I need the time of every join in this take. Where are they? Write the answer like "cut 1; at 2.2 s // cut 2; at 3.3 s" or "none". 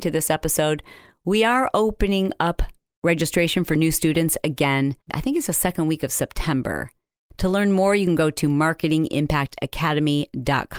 cut 1; at 5.0 s